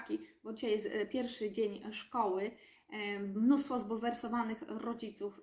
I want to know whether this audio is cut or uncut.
uncut